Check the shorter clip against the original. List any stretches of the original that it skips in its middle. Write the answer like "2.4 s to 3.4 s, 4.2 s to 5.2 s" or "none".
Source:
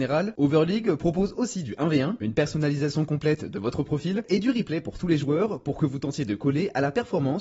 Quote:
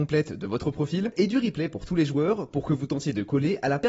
none